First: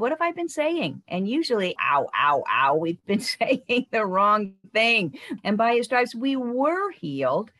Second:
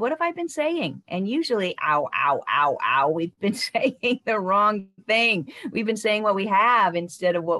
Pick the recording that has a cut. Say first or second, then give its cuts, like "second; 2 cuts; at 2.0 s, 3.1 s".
first; 2 cuts; at 1.8 s, 5.4 s